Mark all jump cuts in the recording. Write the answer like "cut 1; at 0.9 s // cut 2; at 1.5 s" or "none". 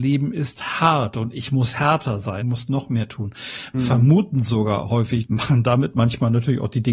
cut 1; at 2.4 s // cut 2; at 3.7 s // cut 3; at 5.2 s